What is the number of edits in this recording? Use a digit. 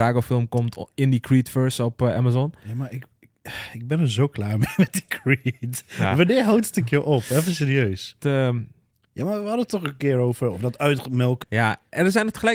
2